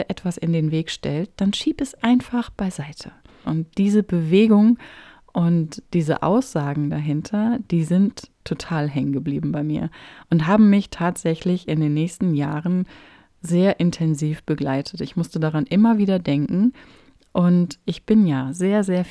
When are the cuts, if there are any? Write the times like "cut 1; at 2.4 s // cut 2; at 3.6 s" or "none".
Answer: cut 1; at 3.4 s